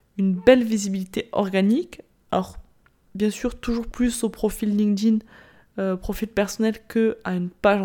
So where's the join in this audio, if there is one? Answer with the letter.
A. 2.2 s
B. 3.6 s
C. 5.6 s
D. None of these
D